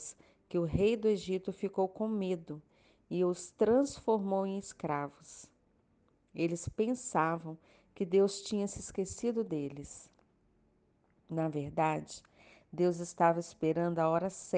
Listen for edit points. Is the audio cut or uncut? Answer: uncut